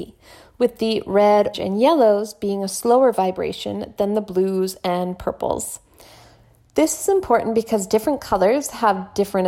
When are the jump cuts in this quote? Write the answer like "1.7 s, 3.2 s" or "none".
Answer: 1.5 s